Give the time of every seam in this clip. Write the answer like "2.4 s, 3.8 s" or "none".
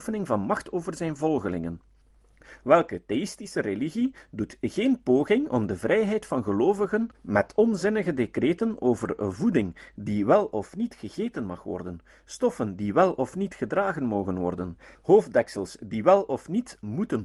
7.1 s, 15.0 s